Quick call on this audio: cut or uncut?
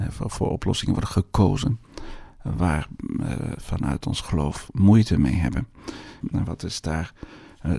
cut